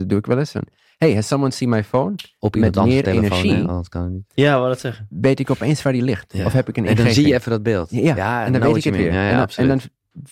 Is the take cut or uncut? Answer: cut